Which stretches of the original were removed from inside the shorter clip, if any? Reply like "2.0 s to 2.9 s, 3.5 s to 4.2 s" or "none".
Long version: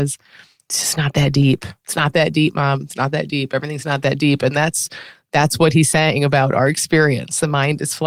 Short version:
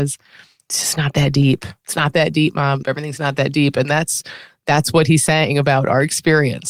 2.8 s to 3.5 s